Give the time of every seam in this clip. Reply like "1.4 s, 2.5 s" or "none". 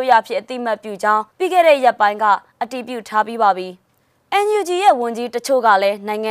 1.3 s